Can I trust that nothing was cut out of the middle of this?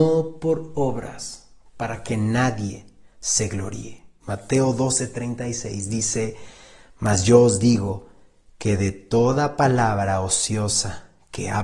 no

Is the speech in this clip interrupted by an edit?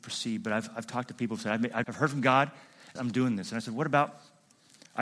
yes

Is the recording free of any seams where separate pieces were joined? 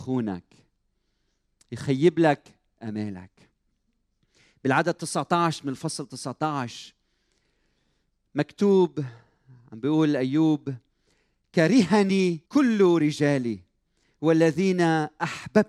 no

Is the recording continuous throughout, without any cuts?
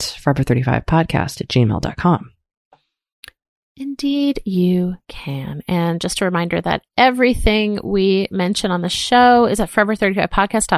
no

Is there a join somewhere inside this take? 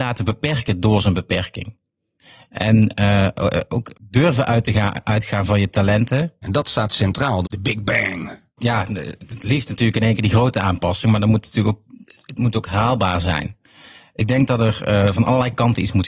yes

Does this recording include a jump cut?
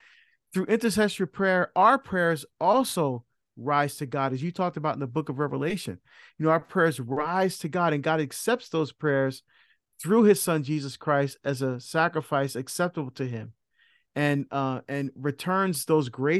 no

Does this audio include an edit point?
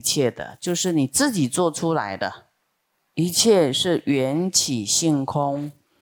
yes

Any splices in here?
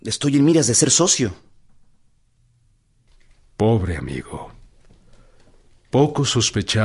no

